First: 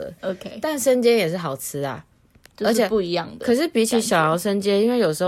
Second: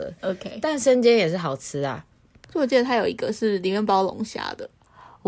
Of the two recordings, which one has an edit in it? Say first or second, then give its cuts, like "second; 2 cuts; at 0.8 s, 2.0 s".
second; 1 cut; at 2.4 s